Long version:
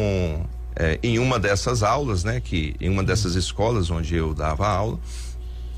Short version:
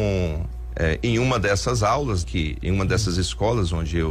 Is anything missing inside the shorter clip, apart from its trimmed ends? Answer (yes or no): yes